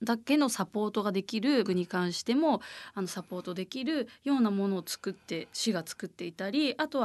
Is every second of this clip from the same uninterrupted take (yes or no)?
no